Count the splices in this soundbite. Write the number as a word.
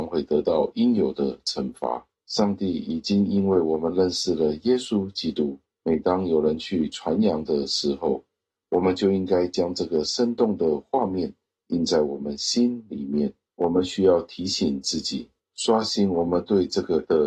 zero